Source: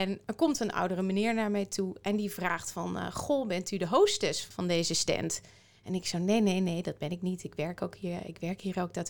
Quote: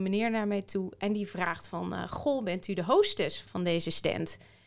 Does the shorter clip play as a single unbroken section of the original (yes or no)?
yes